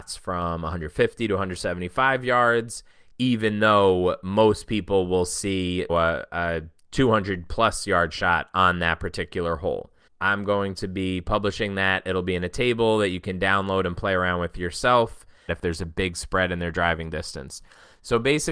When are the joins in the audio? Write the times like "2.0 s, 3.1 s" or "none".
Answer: 5.9 s, 10.1 s, 15.5 s